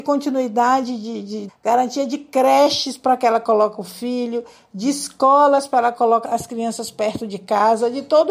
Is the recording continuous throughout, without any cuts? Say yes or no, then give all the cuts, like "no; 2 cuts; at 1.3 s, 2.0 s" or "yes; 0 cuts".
no; 2 cuts; at 1.5 s, 6.2 s